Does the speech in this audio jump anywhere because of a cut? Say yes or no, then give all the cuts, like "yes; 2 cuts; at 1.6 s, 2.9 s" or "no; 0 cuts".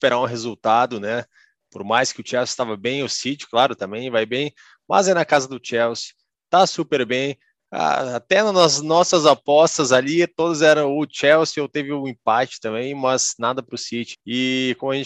yes; 1 cut; at 14.1 s